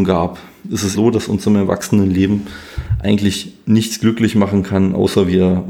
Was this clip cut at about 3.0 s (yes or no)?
no